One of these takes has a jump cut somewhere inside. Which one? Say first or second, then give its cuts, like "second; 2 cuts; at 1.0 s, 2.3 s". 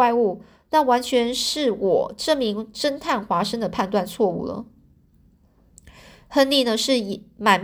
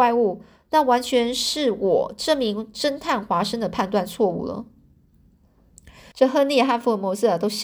second; 1 cut; at 6.1 s